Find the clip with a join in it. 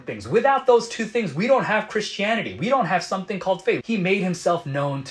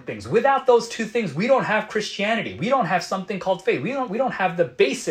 first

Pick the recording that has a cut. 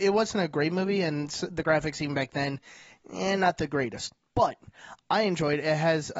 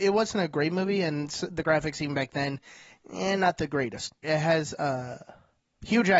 second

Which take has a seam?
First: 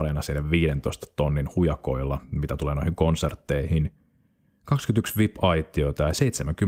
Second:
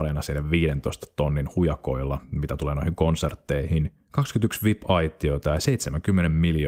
second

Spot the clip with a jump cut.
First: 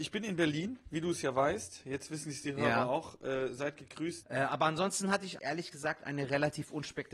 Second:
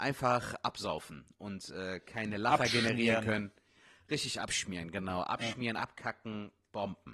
first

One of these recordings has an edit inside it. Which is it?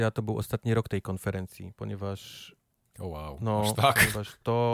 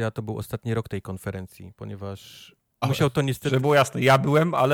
second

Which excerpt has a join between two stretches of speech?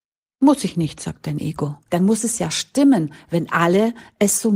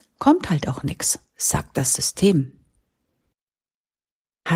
first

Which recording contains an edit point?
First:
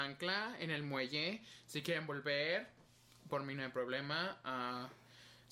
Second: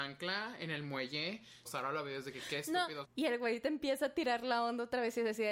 second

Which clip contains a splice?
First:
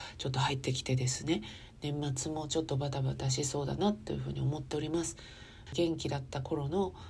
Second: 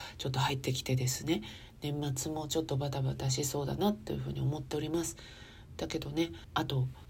first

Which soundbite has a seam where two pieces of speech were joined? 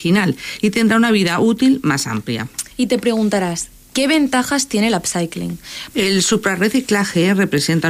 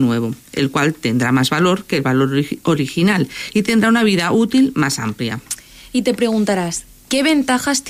first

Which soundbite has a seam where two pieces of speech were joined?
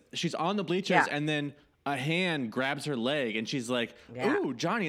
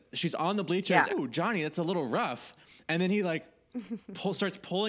second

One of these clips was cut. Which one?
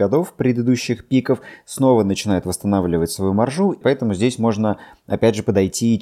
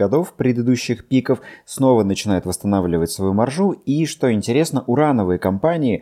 first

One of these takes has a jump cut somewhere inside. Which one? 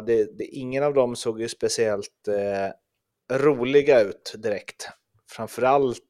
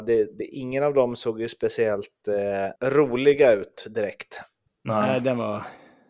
second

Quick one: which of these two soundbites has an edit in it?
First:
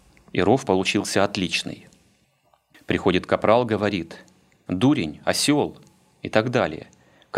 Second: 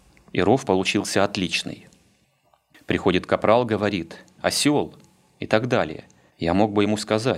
second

